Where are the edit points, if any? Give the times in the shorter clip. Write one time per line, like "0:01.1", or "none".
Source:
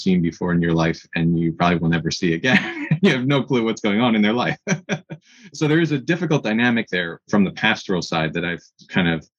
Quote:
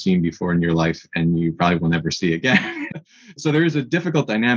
0:02.9